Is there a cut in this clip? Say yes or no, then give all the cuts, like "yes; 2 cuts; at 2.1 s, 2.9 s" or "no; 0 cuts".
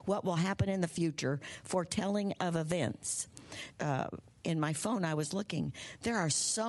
yes; 1 cut; at 3.7 s